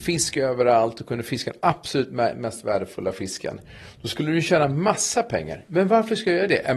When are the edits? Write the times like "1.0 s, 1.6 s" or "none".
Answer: none